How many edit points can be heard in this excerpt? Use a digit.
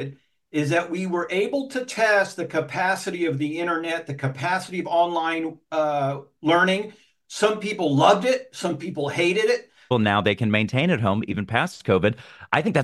1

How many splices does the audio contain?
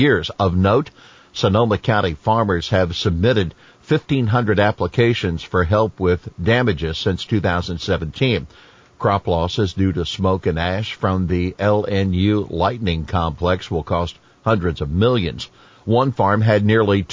0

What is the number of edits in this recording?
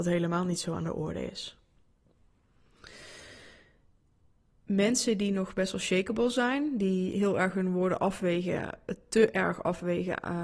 0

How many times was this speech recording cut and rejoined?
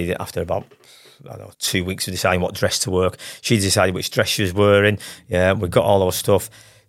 1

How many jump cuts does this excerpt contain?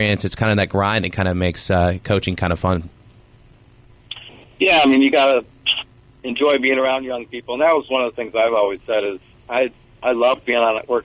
0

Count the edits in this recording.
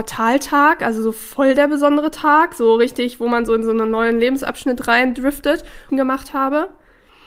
1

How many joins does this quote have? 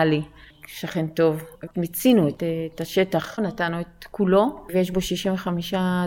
2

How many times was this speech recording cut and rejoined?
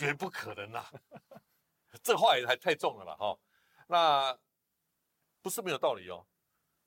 0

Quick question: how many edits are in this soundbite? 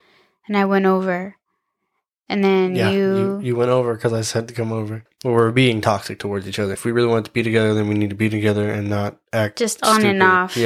2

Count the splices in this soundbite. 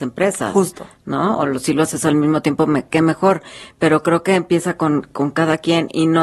0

